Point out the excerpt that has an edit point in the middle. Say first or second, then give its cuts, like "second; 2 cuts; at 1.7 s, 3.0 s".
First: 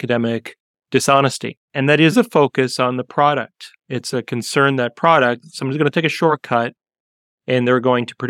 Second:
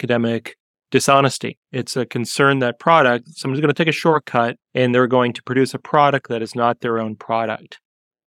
second; 2 cuts; at 1.6 s, 4.6 s